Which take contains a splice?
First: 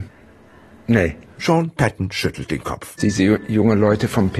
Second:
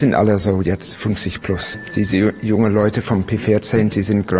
first; 1 cut; at 3.0 s

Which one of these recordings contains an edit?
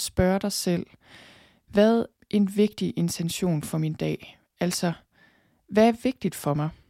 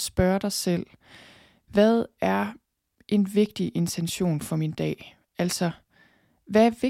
first; 1 cut; at 2.1 s

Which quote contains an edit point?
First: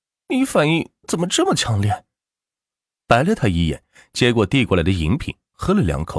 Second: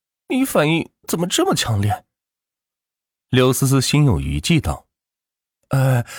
first; 1 cut; at 3.0 s

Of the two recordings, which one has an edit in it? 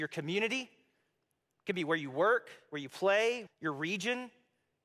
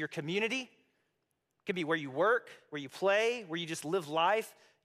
first; 1 cut; at 3.5 s

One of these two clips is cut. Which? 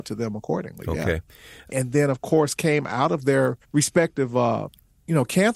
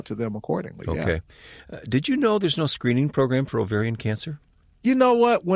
first; 2 cuts; at 1.7 s, 3.6 s

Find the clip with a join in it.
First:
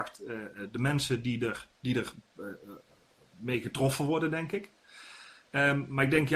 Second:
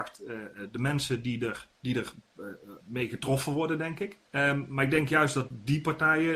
second; 2 cuts; at 2.8 s, 4.3 s

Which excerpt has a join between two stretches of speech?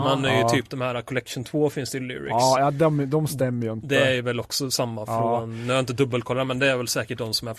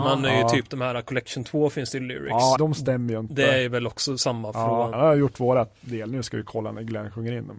second; 2 cuts; at 2.6 s, 4.9 s

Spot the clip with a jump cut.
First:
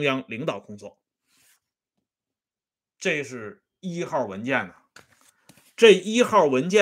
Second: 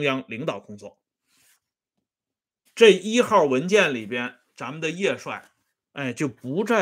second; 1 cut; at 2.7 s

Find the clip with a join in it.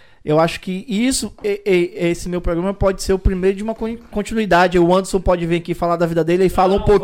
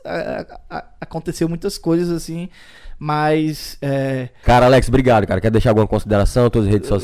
second; 1 cut; at 4.4 s

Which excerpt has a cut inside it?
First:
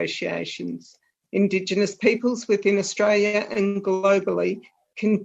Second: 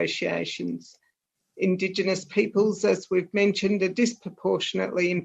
first; 1 cut; at 1.2 s

